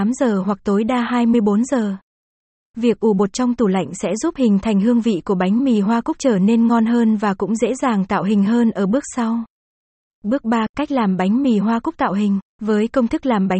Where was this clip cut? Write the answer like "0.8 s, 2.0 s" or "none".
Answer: 12.5 s